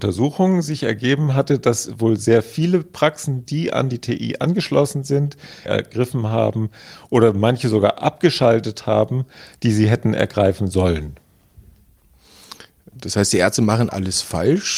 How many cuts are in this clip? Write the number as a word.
one